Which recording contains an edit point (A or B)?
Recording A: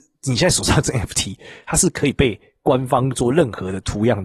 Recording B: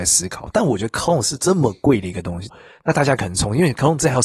B